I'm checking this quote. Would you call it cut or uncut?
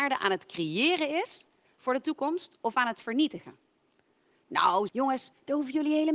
cut